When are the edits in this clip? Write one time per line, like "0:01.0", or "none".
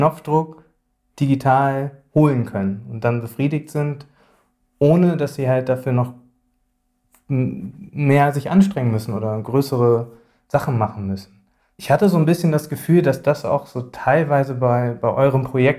none